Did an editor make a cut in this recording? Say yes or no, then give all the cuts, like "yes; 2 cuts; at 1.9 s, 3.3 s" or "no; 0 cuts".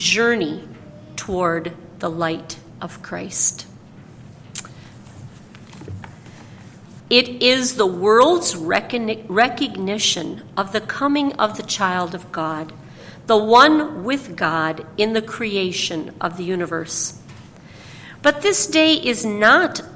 yes; 2 cuts; at 7.0 s, 18.2 s